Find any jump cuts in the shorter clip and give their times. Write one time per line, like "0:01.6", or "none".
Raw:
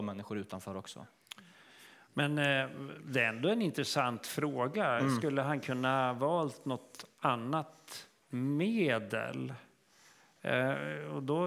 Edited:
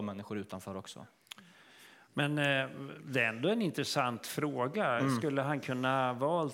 none